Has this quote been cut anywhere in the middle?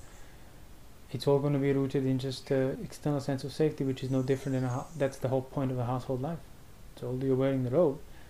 yes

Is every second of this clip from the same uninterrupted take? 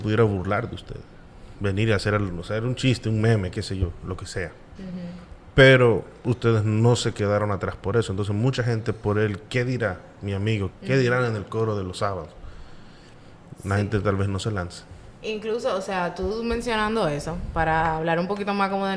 no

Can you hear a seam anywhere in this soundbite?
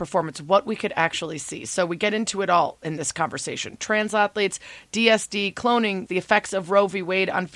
yes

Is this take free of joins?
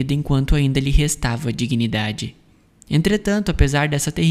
yes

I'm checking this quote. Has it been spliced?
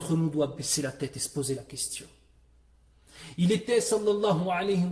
no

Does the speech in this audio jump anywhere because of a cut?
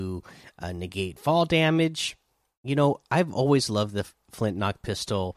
no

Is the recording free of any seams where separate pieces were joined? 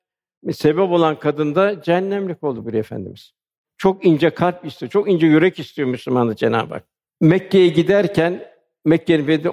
yes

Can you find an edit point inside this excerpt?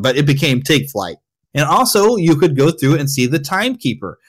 yes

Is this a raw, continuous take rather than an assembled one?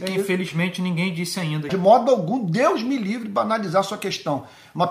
no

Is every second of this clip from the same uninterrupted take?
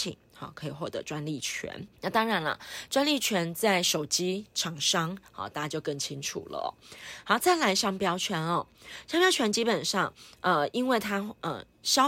no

